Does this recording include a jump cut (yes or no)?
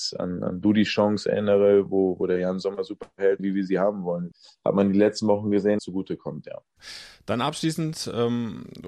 yes